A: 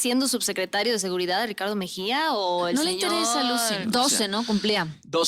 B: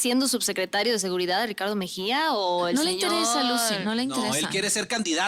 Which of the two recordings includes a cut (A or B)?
A